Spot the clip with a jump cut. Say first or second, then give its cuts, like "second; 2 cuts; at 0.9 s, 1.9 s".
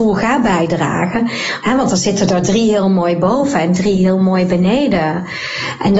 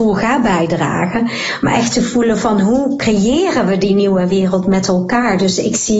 first; 1 cut; at 1.6 s